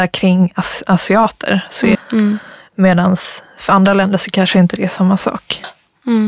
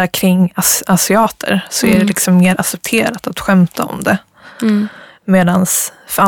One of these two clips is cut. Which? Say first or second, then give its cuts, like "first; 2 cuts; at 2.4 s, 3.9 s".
first; 1 cut; at 1.9 s